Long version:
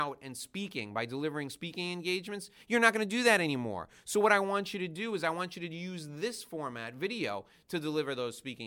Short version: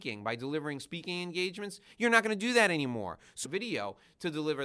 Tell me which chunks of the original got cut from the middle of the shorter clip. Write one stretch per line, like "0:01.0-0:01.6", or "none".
0:04.1-0:06.9